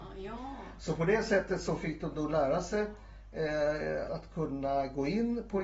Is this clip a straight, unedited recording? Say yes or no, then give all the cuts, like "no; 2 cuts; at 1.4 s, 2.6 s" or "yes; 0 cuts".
no; 1 cut; at 4.1 s